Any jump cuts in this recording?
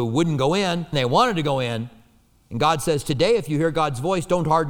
yes; 1 cut; at 0.9 s

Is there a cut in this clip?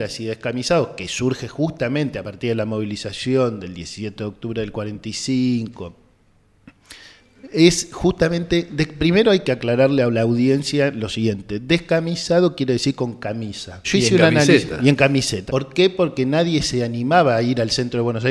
yes; 2 cuts; at 13.8 s, 15.5 s

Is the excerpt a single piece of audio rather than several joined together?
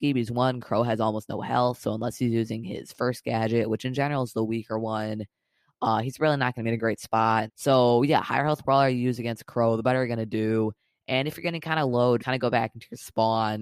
no; 2 cuts; at 7.5 s, 12.2 s

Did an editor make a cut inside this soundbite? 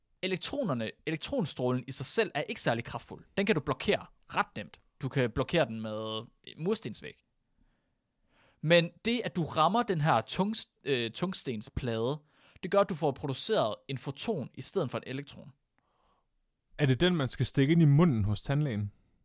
no; 0 cuts

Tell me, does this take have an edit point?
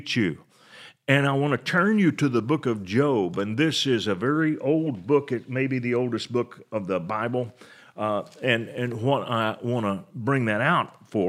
no; 0 cuts

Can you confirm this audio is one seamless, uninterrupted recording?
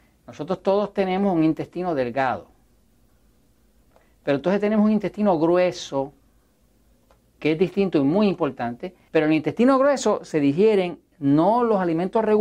no; 2 cuts; at 7.4 s, 9.1 s

